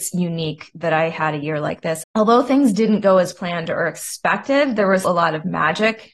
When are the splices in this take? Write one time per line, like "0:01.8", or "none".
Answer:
0:02.0
0:05.0